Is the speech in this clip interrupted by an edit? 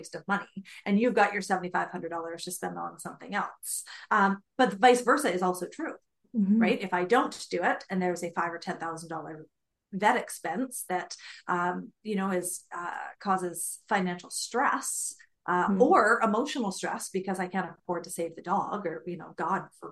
no; 0 cuts

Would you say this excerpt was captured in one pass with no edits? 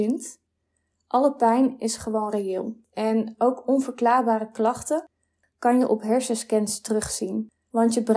yes; 0 cuts

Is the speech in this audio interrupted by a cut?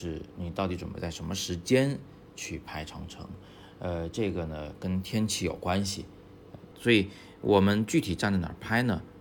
yes; 1 cut; at 6.7 s

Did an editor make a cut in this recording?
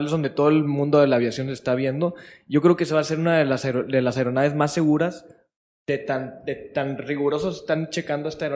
no; 0 cuts

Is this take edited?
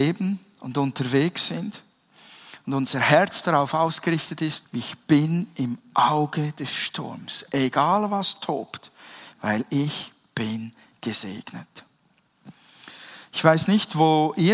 yes; 2 cuts; at 4.6 s, 9.3 s

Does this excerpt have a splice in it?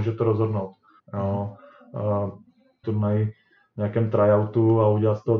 yes; 2 cuts; at 1.0 s, 2.8 s

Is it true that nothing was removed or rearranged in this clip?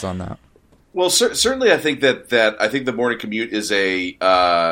yes; 0 cuts

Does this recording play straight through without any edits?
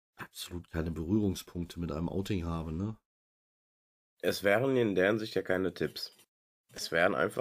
yes; 0 cuts

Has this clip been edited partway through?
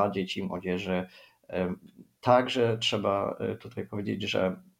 yes; 1 cut; at 2.1 s

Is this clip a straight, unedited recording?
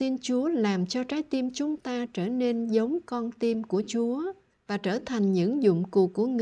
yes; 0 cuts

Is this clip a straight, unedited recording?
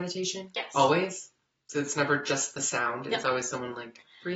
yes; 0 cuts

